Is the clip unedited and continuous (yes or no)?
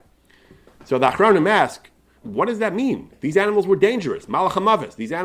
no